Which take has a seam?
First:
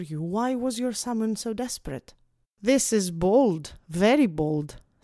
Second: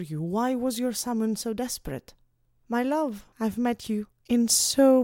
first; 1 cut; at 2.4 s

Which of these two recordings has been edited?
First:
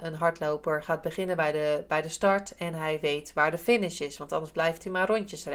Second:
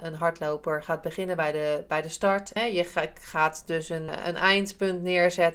second; 2 cuts; at 2.6 s, 4.1 s

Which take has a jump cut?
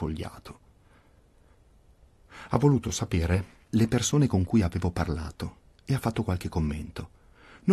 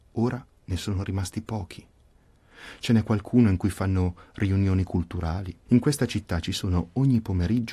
second; 1 cut; at 5.7 s

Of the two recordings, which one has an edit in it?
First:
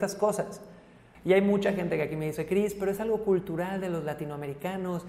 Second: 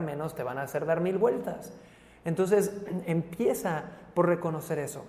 first; 1 cut; at 1.1 s

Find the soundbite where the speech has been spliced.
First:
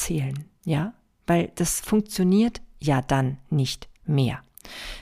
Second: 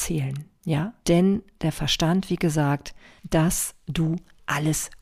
second; 2 cuts; at 1.0 s, 3.2 s

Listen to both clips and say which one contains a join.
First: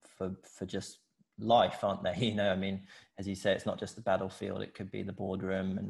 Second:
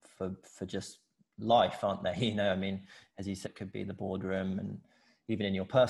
second; 1 cut; at 3.5 s

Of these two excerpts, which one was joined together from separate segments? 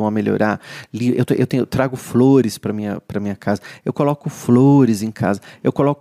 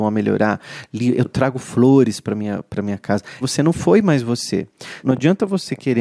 second; 3 cuts; at 1.2 s, 3.4 s, 5.0 s

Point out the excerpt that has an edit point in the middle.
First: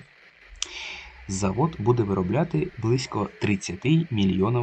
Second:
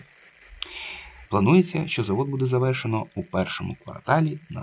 second; 1 cut; at 1.3 s

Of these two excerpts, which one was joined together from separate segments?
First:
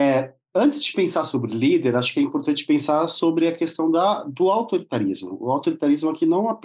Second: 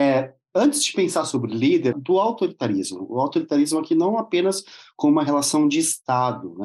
second; 1 cut; at 1.9 s

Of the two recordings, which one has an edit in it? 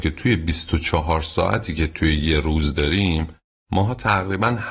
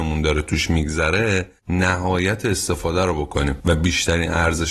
second; 1 cut; at 1.6 s

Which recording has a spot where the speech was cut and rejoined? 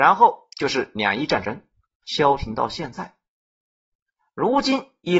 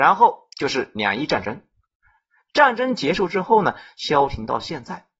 first; 1 cut; at 2.0 s

